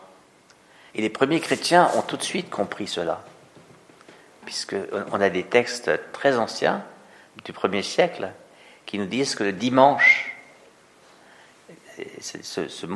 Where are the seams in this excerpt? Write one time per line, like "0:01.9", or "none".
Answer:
0:00.9